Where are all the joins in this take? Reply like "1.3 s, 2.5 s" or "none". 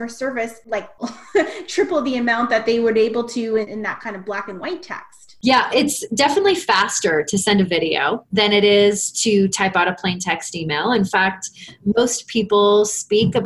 5.7 s